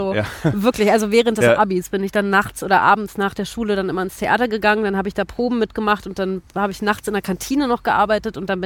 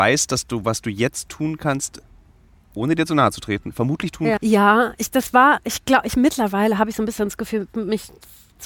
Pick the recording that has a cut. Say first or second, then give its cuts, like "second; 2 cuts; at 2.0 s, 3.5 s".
second; 1 cut; at 4.4 s